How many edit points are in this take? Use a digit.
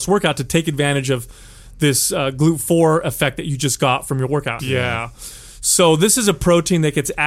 1